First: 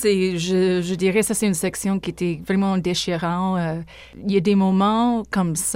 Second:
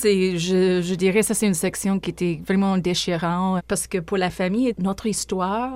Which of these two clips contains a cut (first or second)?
second